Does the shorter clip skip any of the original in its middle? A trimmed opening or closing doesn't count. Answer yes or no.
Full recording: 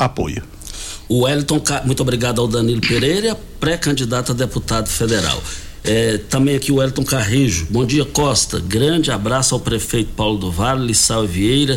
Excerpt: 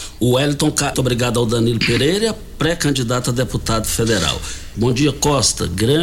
yes